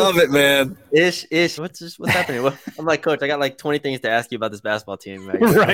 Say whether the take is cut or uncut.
cut